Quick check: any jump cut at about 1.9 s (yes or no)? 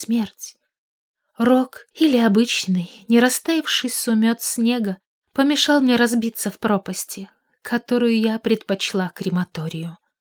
yes